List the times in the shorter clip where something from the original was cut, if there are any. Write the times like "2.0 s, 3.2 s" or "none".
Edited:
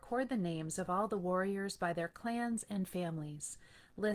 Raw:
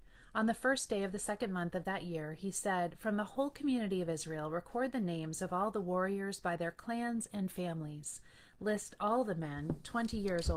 none